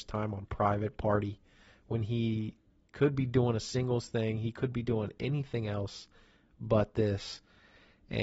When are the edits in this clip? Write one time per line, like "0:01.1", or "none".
none

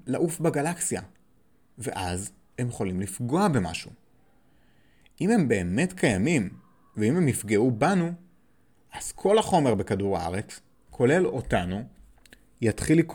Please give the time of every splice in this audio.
0:02.5

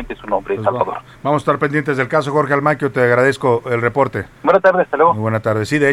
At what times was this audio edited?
0:04.3

